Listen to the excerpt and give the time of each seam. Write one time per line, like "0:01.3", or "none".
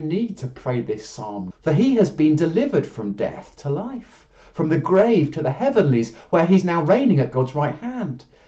0:01.5